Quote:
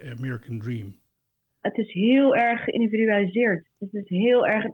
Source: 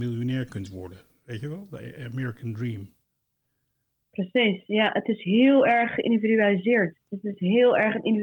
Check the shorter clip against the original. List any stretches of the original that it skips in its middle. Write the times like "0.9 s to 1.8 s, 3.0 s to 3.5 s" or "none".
3.6 s to 4.9 s